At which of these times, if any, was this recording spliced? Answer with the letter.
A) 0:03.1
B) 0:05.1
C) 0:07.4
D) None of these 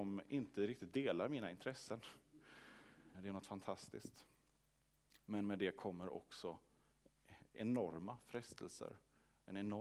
A